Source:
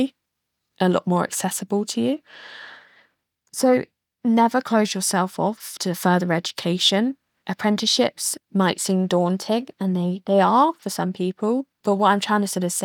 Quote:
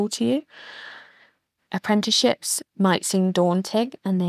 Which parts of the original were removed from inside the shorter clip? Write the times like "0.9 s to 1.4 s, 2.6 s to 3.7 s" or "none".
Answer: 3.3 s to 7.3 s